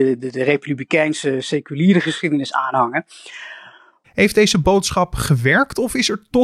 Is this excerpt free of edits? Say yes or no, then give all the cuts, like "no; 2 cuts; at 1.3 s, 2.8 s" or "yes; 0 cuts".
no; 1 cut; at 4.0 s